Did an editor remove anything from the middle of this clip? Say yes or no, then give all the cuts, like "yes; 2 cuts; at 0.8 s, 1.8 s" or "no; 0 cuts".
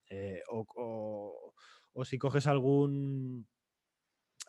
no; 0 cuts